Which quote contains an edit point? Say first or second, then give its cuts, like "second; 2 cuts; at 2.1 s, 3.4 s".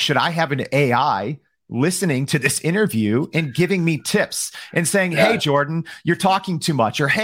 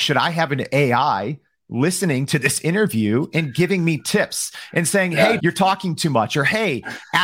second; 1 cut; at 5.4 s